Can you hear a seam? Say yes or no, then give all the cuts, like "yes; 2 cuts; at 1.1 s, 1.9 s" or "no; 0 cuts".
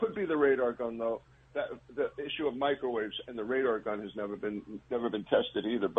no; 0 cuts